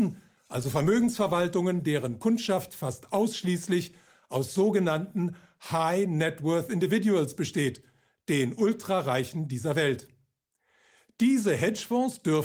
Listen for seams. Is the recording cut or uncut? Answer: uncut